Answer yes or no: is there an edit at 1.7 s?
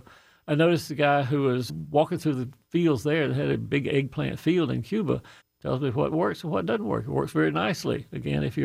yes